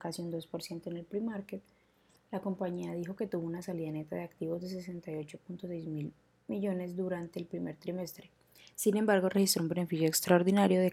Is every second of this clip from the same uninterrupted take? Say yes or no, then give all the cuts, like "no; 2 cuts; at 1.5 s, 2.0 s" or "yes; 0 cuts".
yes; 0 cuts